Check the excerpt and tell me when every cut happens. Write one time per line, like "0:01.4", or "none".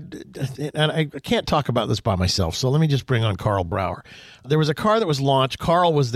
none